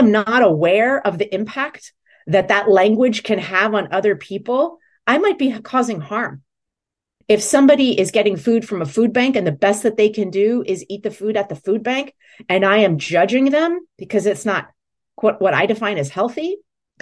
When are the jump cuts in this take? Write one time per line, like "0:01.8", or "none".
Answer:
0:07.2
0:13.9